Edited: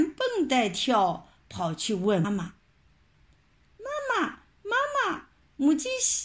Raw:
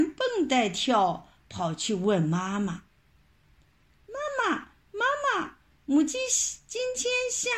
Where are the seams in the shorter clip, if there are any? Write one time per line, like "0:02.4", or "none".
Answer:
0:02.2